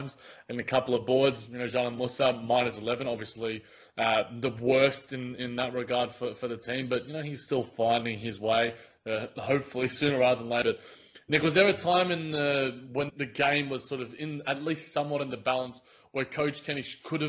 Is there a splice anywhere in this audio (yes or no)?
yes